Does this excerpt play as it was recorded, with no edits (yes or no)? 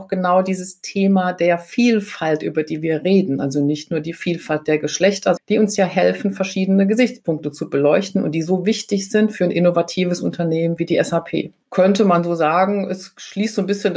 no